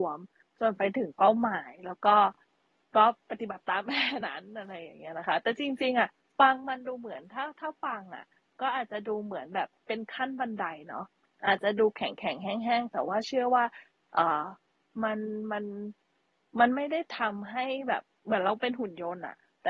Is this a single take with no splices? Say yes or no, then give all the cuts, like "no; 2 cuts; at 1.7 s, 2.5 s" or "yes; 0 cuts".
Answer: no; 1 cut; at 4.2 s